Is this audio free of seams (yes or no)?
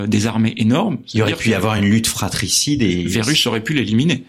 yes